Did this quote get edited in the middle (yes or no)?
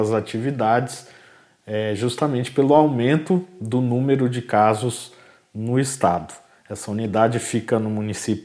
no